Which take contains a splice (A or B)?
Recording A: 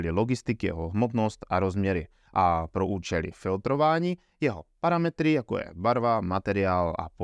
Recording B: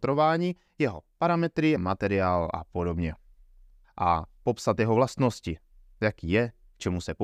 B